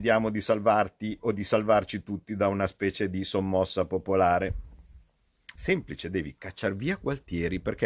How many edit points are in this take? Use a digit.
1